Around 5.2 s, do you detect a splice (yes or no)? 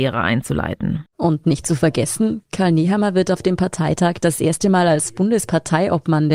no